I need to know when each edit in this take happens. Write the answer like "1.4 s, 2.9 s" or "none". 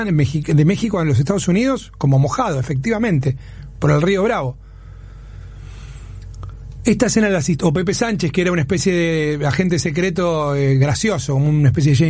none